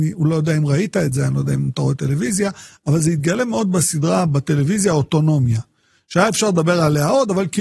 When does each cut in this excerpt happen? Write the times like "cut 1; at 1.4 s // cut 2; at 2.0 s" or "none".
none